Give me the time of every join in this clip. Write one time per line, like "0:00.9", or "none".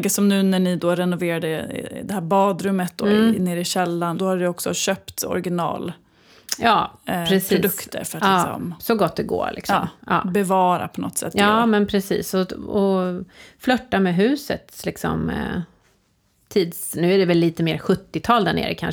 0:04.2